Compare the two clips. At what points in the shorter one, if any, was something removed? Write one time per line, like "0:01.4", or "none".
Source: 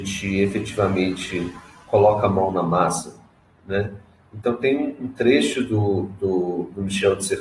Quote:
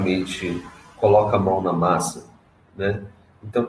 none